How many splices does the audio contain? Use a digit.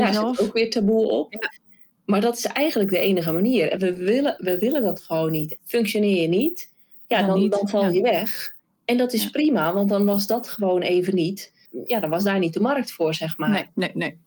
2